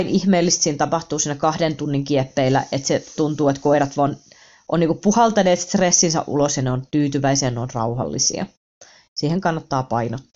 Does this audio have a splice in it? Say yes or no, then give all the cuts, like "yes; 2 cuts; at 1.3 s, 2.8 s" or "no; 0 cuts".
no; 0 cuts